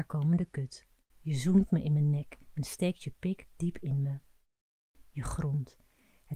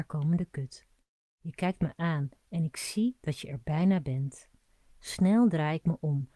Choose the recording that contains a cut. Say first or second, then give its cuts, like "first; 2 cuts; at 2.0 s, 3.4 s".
first; 2 cuts; at 1.1 s, 5.0 s